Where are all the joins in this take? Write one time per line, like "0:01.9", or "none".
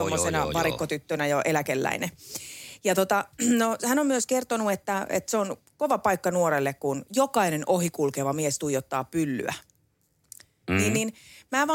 none